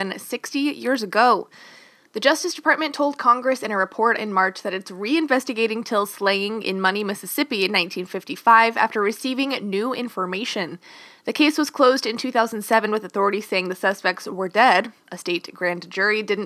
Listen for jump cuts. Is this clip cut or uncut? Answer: uncut